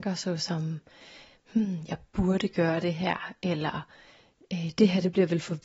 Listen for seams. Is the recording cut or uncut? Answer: uncut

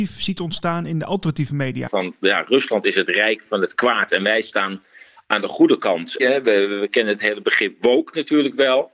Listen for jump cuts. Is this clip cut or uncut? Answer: cut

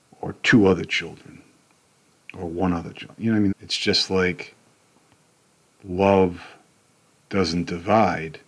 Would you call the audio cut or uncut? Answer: cut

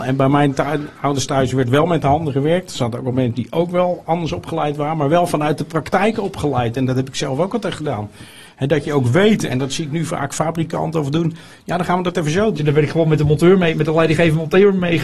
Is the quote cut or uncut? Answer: cut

